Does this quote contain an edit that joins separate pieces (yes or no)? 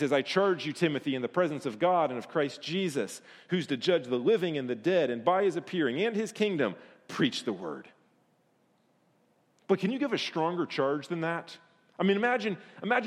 no